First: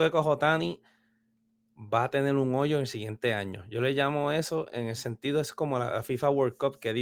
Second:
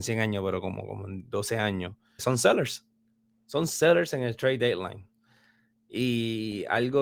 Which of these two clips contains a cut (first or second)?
second